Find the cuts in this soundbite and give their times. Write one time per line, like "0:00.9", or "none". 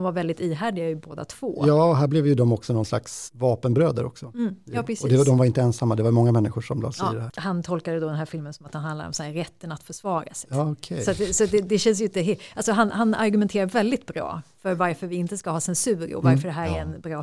0:07.3
0:10.4